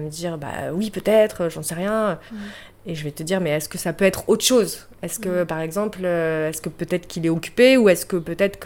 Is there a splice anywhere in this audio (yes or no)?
yes